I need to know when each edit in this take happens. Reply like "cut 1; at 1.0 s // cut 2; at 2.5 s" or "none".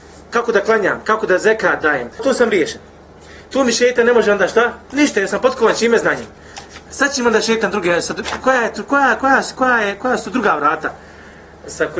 cut 1; at 2.2 s // cut 2; at 4.8 s